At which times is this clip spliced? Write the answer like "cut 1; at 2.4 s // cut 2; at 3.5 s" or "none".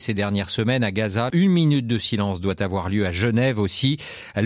cut 1; at 1.3 s

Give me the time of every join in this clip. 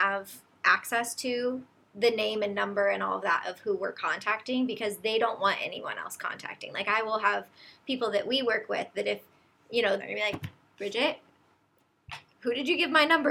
cut 1; at 10.0 s

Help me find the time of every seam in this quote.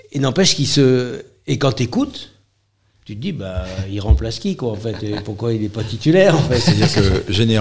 none

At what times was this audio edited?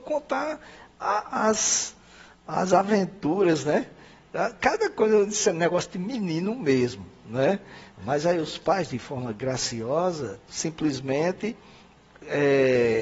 cut 1; at 7.9 s // cut 2; at 10.4 s

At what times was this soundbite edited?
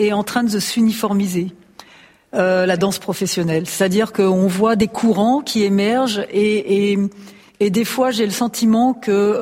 none

